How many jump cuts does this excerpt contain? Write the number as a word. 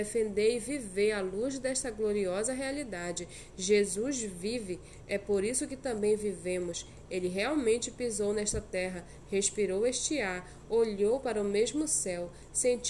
zero